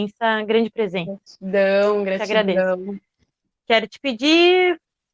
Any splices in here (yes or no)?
no